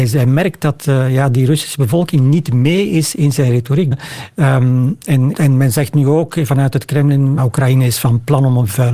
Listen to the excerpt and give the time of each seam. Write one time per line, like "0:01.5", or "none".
0:03.9
0:05.3
0:07.4